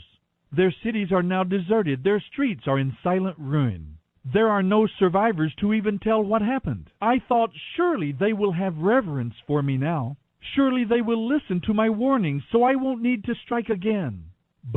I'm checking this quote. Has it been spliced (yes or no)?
yes